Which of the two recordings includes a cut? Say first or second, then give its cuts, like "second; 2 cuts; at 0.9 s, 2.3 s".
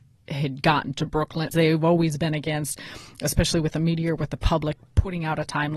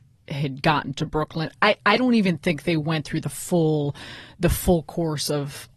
first; 1 cut; at 1.5 s